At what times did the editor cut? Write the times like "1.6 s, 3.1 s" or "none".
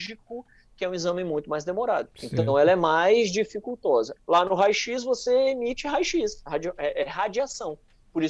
2.1 s, 4.2 s

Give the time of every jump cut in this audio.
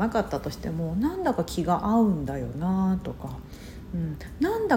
none

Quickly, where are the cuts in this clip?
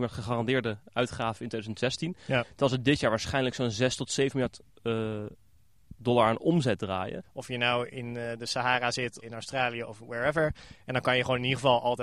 7.2 s, 9.2 s

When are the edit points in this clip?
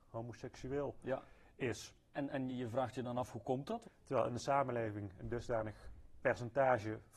2.5 s, 3.8 s

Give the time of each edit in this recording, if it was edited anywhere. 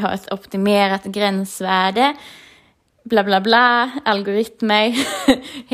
none

